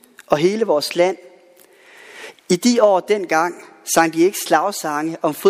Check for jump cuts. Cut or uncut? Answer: uncut